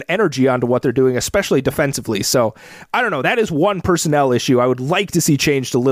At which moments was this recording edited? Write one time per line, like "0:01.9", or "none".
none